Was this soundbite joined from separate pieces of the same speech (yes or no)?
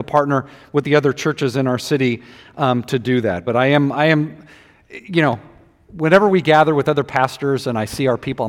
no